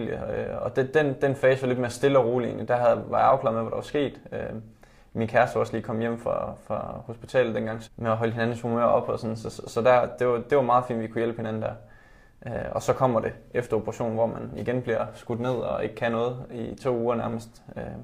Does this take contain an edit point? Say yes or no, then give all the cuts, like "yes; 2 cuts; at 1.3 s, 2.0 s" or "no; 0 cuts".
yes; 1 cut; at 7.8 s